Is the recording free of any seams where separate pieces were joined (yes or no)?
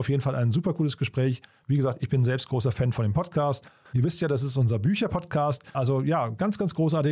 no